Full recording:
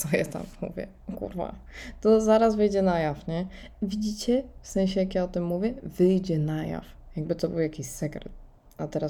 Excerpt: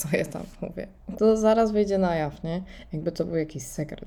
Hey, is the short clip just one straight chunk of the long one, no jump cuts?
no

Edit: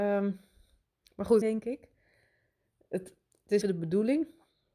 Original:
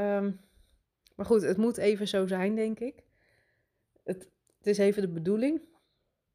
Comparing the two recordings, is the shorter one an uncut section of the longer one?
no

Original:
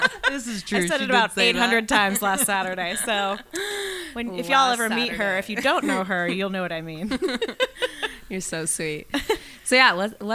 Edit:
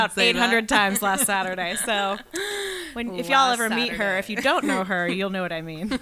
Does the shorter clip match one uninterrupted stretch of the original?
yes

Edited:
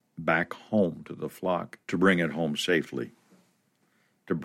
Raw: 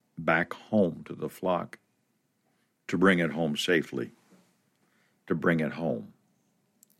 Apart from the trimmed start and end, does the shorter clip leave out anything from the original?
yes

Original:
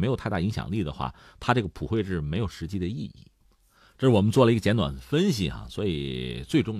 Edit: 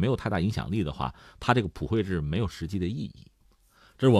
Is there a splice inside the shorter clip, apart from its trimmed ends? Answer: no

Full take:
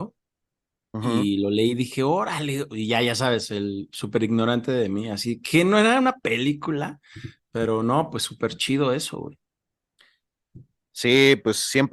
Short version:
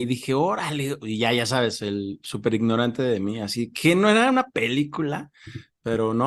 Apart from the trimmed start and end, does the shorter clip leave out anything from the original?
no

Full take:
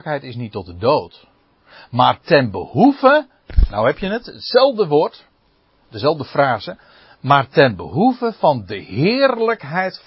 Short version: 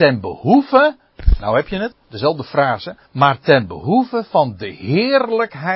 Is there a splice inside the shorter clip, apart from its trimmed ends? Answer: yes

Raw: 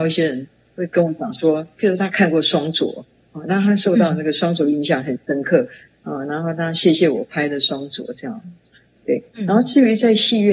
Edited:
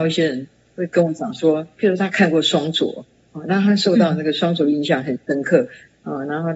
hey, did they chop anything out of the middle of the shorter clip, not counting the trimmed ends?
no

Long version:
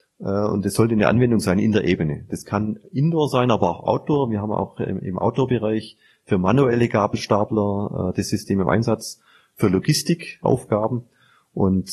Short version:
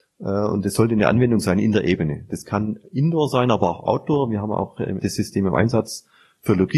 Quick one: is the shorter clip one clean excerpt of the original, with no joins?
no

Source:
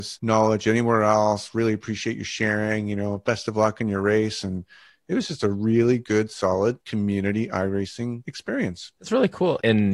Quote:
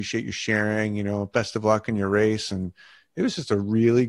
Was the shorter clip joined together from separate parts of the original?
no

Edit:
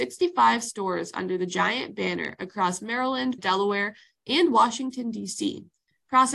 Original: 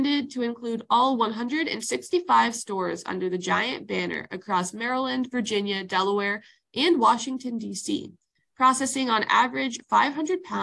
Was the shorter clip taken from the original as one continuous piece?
no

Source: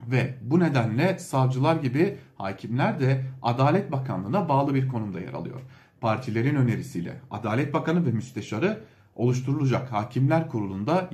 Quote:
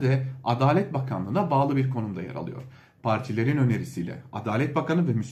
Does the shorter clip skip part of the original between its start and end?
no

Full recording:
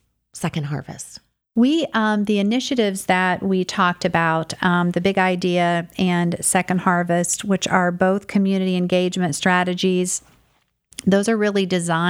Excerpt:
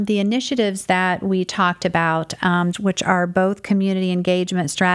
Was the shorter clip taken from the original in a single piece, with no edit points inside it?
no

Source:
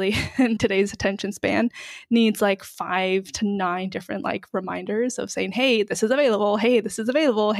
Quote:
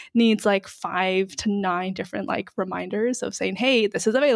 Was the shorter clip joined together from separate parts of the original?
no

